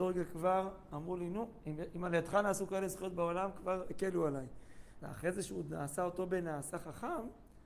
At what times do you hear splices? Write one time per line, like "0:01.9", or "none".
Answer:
0:05.0

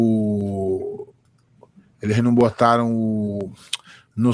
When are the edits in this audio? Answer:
none

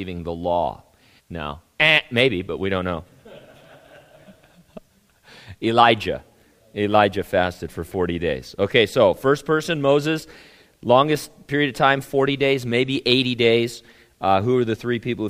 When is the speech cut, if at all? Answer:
0:01.2

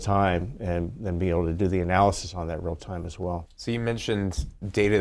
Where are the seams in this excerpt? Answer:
0:03.5

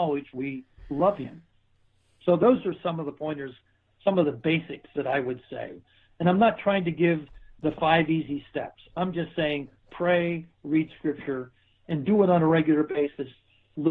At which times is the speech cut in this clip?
none

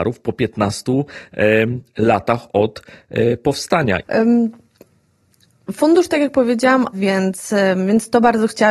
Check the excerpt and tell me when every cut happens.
0:04.0
0:06.9

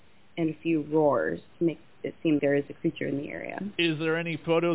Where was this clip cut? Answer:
0:02.4

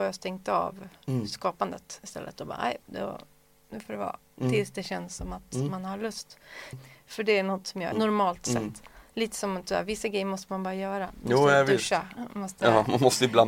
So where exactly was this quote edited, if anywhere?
0:06.7
0:07.9

